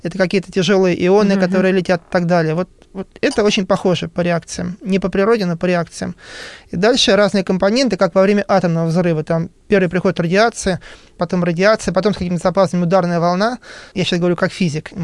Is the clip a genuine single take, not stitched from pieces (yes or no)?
no